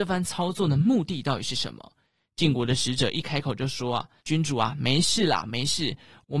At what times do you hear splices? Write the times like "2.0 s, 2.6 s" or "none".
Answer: 4.2 s